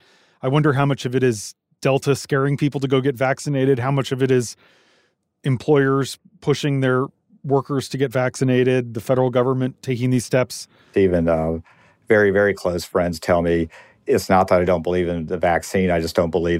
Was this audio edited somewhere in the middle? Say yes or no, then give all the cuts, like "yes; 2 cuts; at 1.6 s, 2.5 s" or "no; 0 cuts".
yes; 1 cut; at 10.9 s